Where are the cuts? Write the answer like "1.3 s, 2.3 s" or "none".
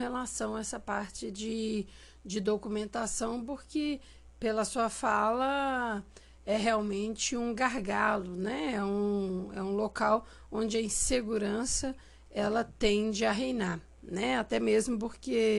none